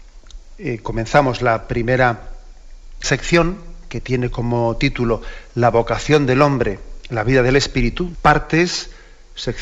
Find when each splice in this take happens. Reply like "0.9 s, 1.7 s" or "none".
3.0 s, 8.1 s